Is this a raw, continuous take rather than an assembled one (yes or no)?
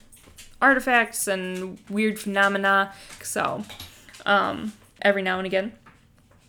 no